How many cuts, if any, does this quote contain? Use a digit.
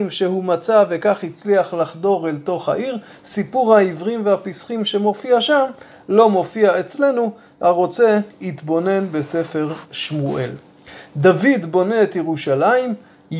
0